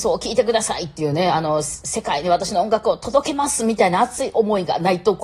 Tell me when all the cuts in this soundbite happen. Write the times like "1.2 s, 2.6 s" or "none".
none

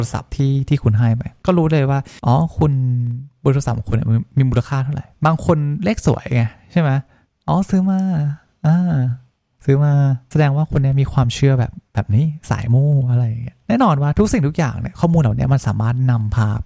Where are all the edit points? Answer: none

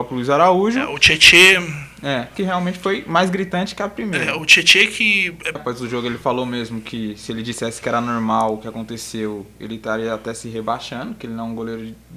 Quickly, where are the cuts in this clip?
2.3 s, 5.5 s

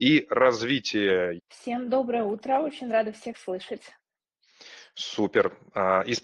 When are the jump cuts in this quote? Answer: 1.4 s

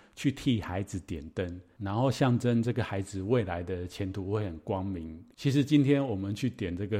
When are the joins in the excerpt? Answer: 5.3 s

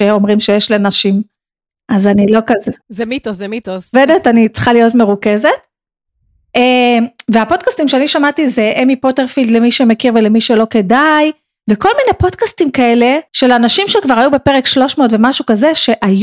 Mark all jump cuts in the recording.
2.8 s, 3.9 s, 13.3 s

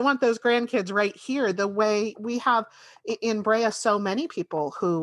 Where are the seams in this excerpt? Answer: 2.2 s

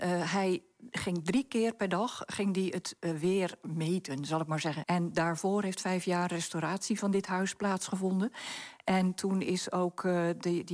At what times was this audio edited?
4.8 s

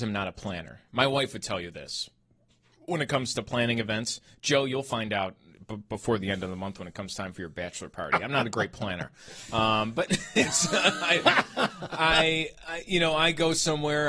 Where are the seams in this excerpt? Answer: none

